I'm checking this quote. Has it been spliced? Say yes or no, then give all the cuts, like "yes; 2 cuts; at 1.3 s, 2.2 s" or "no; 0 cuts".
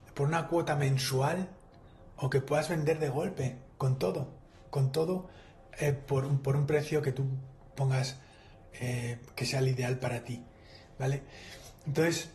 no; 0 cuts